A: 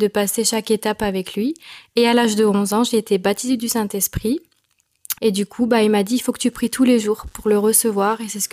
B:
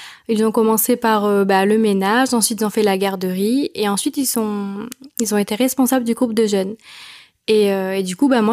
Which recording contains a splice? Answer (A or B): A